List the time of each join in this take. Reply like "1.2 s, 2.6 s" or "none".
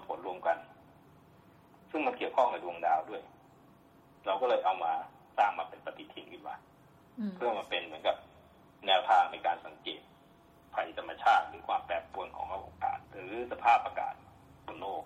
13.0 s